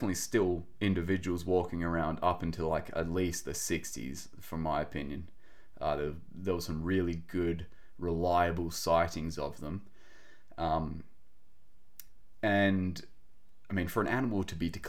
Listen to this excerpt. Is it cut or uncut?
uncut